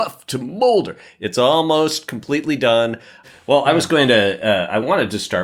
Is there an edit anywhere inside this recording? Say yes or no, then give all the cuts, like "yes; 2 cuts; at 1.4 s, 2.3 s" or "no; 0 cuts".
yes; 1 cut; at 3.2 s